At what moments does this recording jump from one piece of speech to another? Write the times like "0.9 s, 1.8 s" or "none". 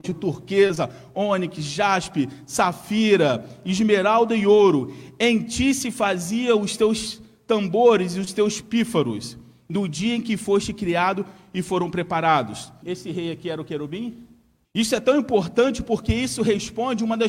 12.8 s, 14.6 s